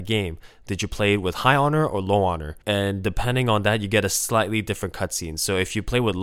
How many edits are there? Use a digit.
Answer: 1